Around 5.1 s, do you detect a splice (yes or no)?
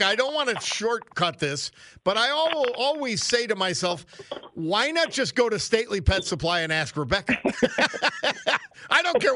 no